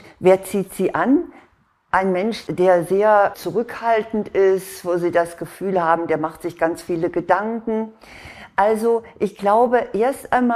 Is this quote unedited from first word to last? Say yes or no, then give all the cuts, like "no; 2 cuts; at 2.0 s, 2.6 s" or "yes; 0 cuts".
yes; 0 cuts